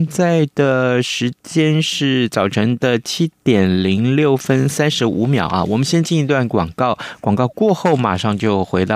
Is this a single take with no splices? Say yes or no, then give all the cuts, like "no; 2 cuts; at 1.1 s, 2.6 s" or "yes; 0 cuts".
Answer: yes; 0 cuts